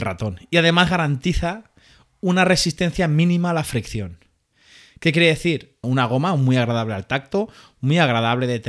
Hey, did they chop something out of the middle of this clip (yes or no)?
yes